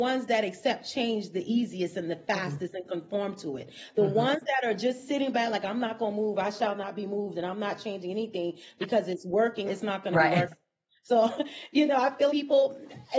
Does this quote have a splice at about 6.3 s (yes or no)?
no